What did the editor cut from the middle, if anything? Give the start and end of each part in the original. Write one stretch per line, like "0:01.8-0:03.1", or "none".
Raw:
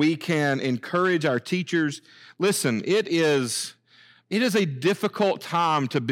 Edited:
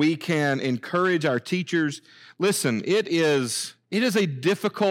0:03.8-0:04.2